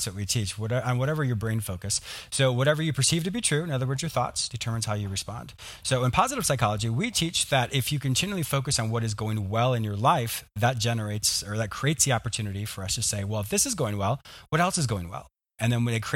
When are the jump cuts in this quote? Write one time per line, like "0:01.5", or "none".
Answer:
0:04.5

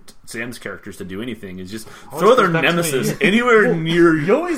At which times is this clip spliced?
none

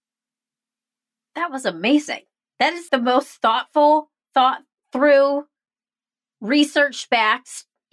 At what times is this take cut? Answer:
0:02.9

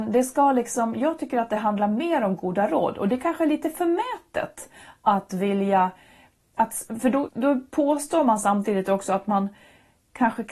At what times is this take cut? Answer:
0:07.3

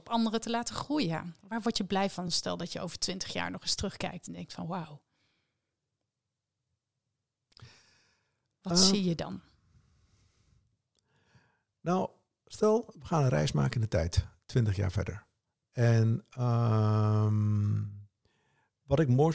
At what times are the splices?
none

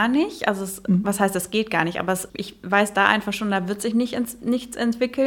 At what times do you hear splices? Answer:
0:02.3

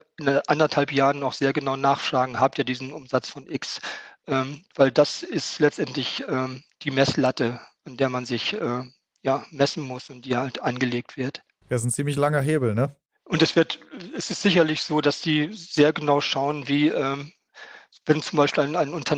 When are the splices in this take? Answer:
0:11.6

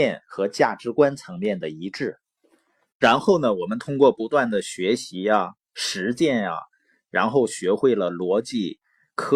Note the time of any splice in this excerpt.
0:03.0

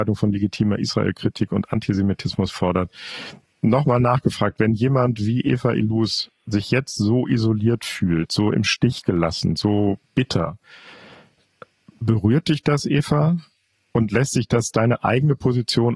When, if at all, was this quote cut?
0:10.0

